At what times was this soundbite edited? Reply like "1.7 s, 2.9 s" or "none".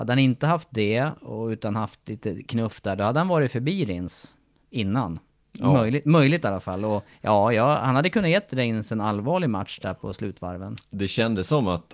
none